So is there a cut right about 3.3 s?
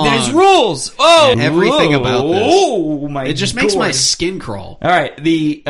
no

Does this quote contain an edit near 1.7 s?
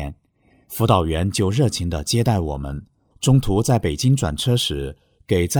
no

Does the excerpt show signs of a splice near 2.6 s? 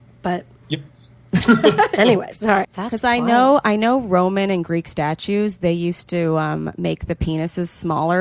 yes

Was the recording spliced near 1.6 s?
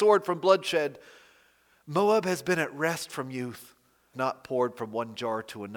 no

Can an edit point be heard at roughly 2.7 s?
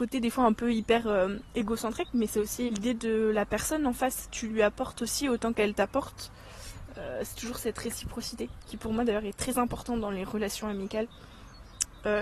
yes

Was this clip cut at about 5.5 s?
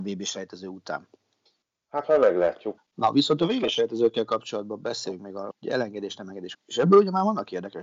yes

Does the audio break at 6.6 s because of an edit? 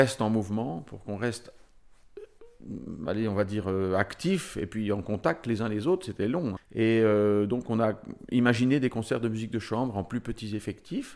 yes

